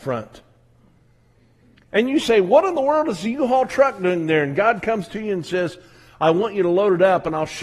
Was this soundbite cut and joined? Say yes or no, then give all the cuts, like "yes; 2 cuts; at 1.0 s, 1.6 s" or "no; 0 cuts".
no; 0 cuts